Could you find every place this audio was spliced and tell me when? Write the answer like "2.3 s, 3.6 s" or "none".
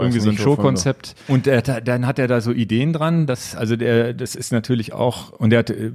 1.3 s